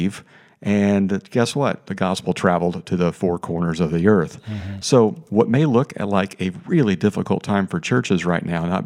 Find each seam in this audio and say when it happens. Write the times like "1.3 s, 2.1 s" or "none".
none